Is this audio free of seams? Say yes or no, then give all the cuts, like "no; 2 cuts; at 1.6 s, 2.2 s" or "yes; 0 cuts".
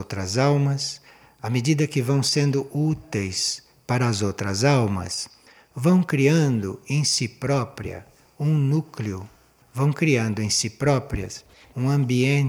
no; 1 cut; at 9.6 s